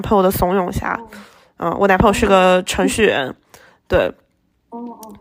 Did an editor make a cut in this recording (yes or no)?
no